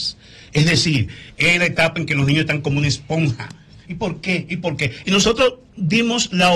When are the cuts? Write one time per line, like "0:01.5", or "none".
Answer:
0:03.8
0:05.0